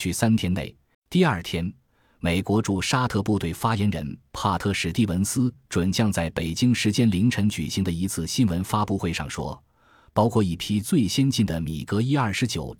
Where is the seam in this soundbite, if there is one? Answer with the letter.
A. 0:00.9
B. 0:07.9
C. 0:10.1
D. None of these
A